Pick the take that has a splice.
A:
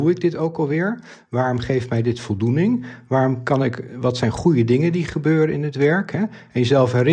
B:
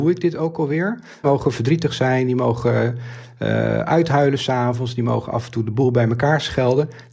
B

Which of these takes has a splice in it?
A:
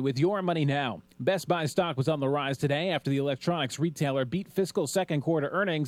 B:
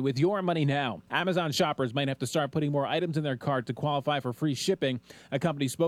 B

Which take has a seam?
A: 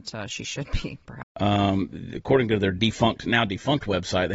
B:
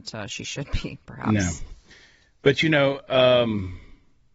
A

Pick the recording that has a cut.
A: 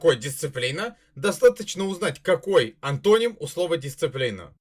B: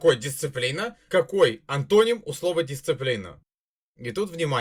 B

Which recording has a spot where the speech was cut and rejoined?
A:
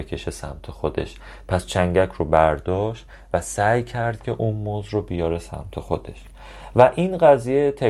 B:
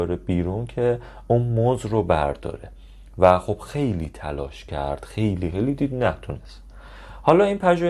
B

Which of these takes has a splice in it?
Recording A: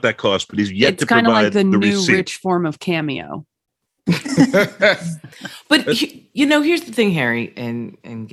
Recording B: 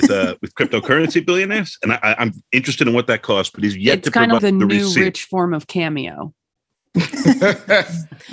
B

